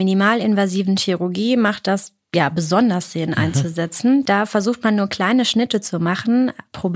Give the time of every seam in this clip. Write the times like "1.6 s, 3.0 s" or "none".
none